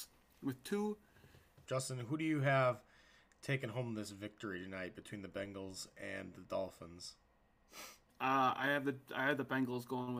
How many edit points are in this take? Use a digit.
2